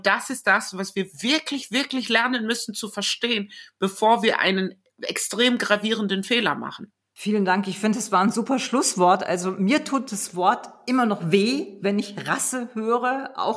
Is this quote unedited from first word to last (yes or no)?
yes